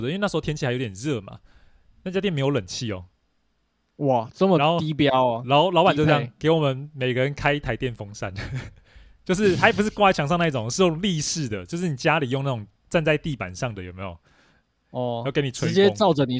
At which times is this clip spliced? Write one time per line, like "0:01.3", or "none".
none